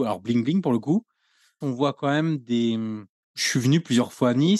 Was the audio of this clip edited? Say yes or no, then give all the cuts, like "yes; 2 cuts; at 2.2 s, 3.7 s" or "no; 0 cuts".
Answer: yes; 2 cuts; at 1.6 s, 3.2 s